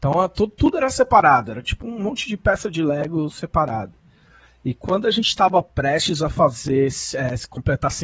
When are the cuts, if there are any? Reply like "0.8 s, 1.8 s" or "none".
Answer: none